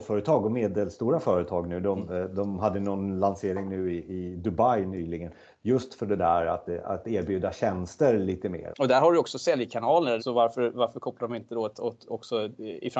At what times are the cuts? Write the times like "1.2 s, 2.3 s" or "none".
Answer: 8.7 s, 10.2 s

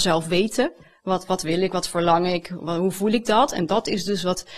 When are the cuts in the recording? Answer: none

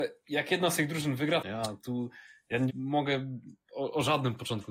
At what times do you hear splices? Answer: 1.4 s, 2.7 s

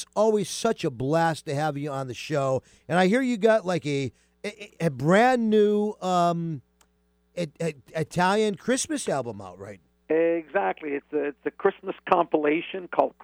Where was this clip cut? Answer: none

